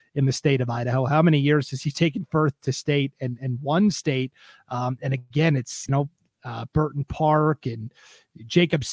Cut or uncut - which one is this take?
uncut